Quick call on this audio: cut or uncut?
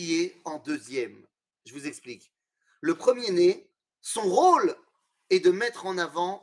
uncut